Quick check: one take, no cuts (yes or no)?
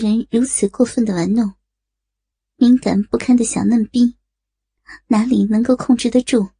yes